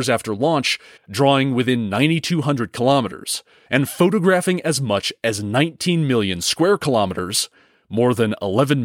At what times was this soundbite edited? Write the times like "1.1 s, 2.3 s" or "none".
1.0 s, 3.7 s

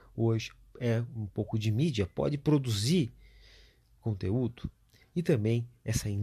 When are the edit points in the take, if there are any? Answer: none

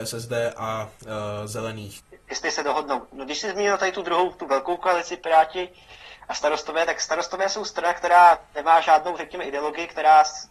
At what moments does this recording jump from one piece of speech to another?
none

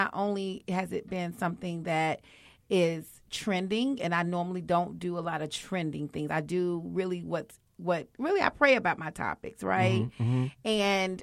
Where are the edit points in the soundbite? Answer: none

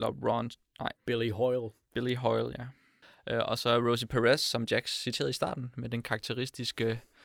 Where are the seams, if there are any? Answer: 1.0 s

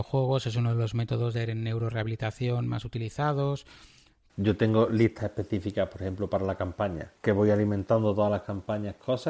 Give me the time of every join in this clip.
4.3 s, 7.2 s

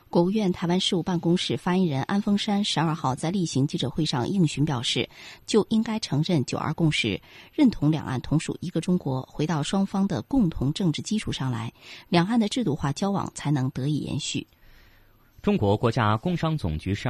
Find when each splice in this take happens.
5.4 s

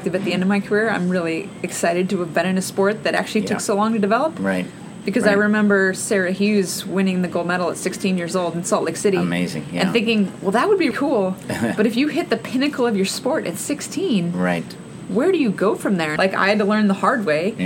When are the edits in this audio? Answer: 10.9 s, 16.2 s

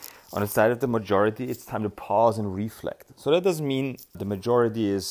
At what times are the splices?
4.1 s

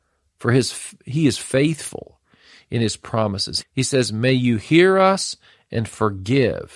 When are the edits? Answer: 3.6 s

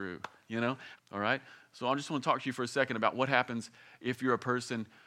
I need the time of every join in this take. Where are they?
1.0 s

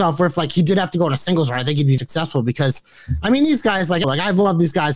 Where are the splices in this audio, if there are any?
2.0 s, 4.0 s

